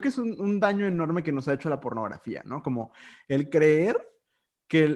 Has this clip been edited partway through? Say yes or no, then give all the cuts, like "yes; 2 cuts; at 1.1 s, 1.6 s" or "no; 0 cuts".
no; 0 cuts